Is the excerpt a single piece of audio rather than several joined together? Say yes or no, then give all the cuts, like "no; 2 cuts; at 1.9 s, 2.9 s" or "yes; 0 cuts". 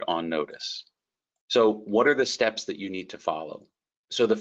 yes; 0 cuts